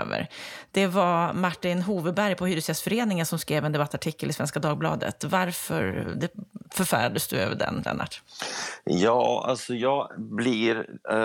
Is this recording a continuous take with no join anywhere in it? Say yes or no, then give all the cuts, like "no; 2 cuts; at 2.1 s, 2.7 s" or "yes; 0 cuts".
yes; 0 cuts